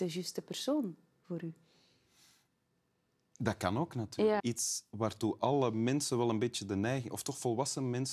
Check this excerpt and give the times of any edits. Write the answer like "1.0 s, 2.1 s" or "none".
4.4 s